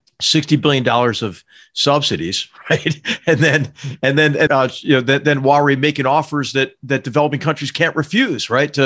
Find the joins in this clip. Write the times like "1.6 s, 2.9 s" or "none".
4.5 s